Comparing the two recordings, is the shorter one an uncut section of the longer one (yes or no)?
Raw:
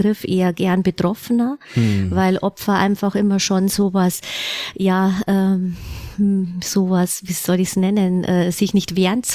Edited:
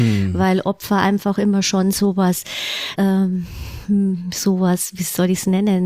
no